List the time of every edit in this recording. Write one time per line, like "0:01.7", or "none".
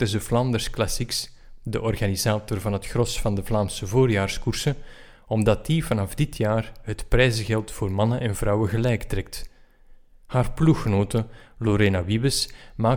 none